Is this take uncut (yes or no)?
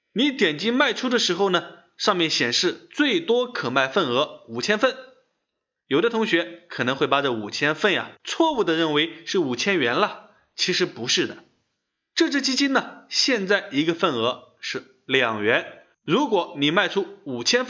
yes